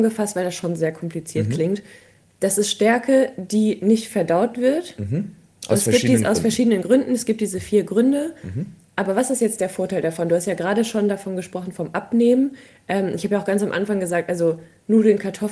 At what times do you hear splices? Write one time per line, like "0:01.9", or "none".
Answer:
none